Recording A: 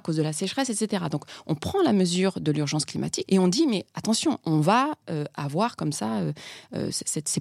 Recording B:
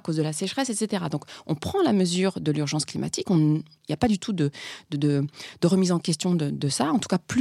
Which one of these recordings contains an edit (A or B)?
A